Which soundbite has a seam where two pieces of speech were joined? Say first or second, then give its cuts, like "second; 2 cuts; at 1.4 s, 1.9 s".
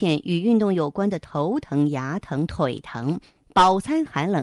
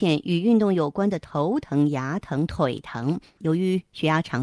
second; 1 cut; at 3.4 s